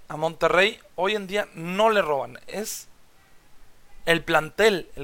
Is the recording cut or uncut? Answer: uncut